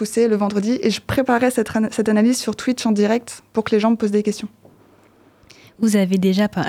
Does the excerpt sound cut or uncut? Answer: uncut